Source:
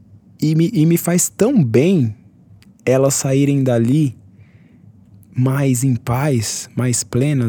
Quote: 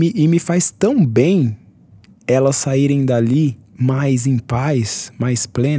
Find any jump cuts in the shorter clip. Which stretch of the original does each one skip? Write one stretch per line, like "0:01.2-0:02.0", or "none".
0:04.2-0:05.2